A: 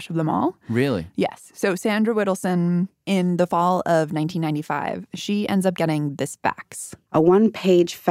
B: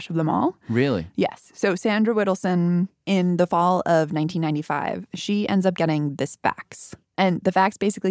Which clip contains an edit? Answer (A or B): B